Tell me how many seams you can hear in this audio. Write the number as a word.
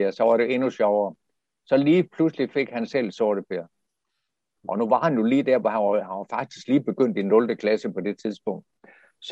one